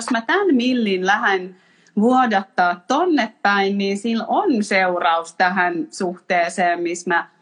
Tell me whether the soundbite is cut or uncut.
uncut